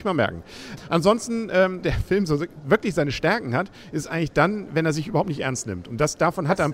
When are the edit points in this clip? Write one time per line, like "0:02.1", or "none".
0:01.8